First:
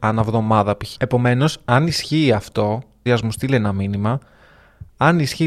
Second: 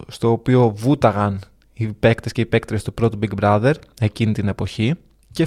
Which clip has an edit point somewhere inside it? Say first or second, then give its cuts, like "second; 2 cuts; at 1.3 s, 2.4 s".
first; 2 cuts; at 0.9 s, 3.1 s